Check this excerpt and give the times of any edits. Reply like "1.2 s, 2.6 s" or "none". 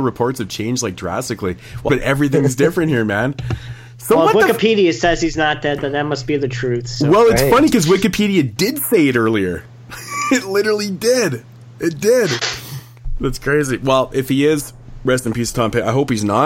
1.9 s